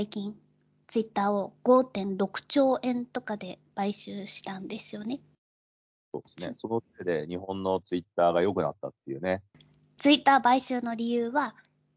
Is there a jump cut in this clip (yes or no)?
yes